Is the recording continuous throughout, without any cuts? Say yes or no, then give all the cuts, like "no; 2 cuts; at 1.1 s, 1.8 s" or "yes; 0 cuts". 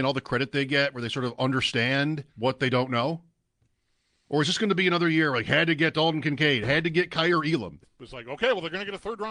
no; 2 cuts; at 2.3 s, 7.8 s